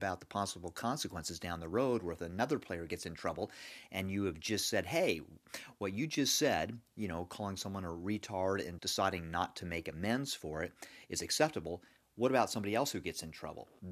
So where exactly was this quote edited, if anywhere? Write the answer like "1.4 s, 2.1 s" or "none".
8.8 s